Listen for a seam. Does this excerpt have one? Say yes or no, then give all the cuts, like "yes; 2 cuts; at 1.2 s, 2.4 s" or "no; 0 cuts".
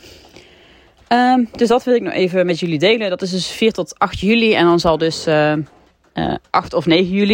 no; 0 cuts